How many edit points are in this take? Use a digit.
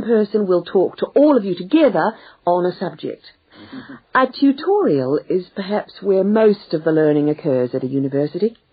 1